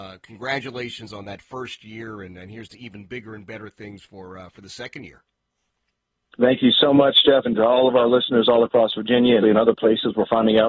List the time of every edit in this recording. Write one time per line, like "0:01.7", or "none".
0:07.4
0:09.4